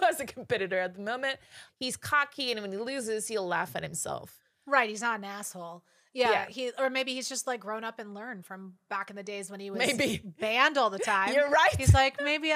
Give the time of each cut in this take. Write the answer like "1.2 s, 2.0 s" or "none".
1.7 s